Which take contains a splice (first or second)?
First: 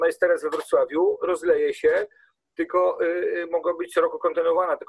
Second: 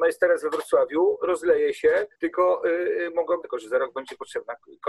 second